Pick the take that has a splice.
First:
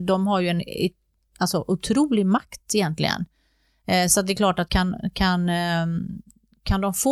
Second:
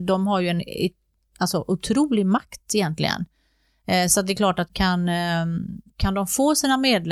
second; 2 cuts; at 4.7 s, 5.9 s

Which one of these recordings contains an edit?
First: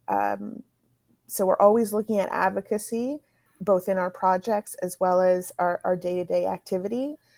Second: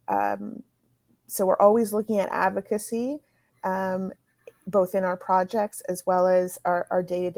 first; 1 cut; at 3.5 s

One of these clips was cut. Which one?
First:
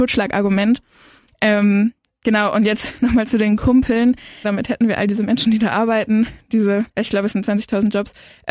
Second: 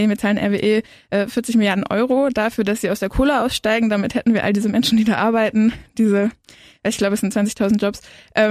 first; 2 cuts; at 4.4 s, 6.9 s

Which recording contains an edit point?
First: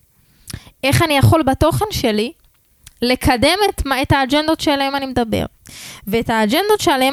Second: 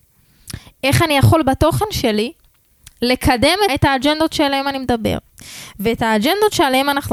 second; 1 cut; at 3.7 s

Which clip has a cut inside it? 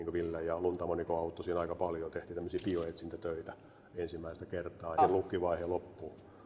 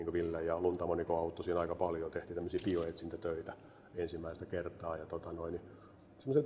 first; 1 cut; at 5.0 s

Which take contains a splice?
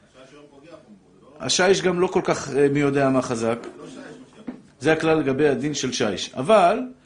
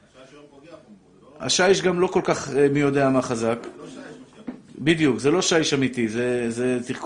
first; 1 cut; at 4.7 s

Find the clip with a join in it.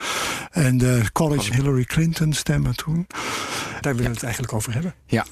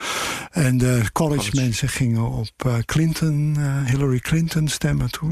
first; 2 cuts; at 1.5 s, 3.8 s

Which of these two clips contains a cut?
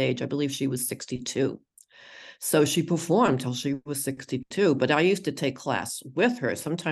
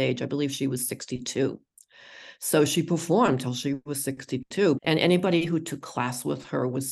second; 1 cut; at 4.8 s

